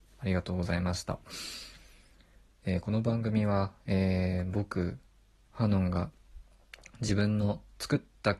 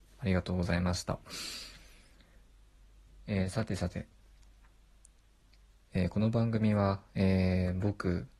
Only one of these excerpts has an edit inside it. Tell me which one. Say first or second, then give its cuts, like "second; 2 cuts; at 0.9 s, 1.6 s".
first; 1 cut; at 2.5 s